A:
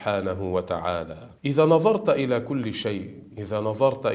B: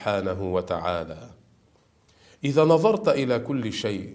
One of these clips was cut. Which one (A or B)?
A